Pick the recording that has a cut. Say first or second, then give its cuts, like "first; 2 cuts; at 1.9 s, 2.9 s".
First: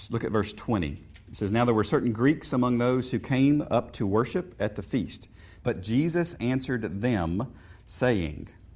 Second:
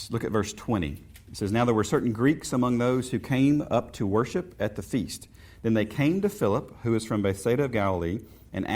first; 1 cut; at 5.6 s